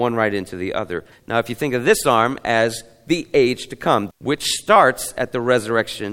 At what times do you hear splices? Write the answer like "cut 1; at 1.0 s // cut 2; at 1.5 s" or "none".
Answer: cut 1; at 1.1 s // cut 2; at 4.1 s